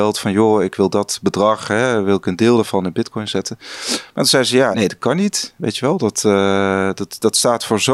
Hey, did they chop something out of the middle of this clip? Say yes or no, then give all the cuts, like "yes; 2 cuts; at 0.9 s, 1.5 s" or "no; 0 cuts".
yes; 1 cut; at 4.7 s